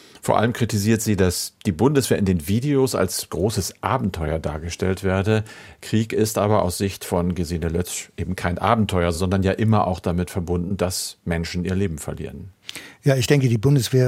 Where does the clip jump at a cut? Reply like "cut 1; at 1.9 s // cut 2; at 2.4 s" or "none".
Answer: none

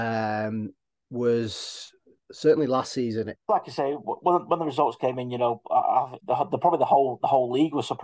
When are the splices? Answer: cut 1; at 3.4 s // cut 2; at 6.2 s

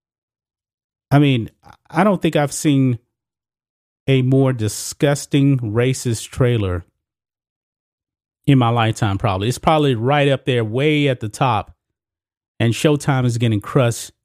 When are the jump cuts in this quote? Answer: none

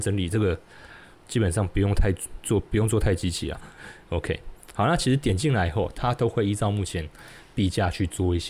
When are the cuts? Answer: cut 1; at 3.6 s // cut 2; at 5.9 s

